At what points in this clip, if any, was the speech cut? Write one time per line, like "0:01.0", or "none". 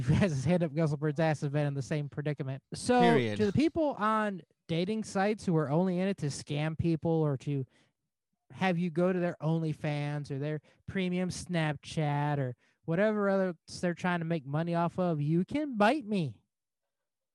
0:02.6